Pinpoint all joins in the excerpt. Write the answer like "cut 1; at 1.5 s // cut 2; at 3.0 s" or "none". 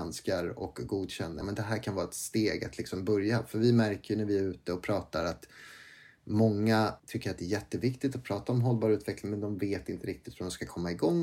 cut 1; at 1.4 s // cut 2; at 7.0 s